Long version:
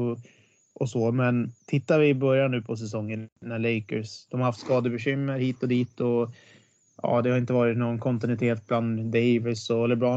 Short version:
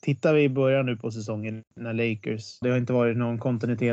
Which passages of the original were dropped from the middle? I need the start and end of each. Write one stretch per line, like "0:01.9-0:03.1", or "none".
0:04.3-0:07.2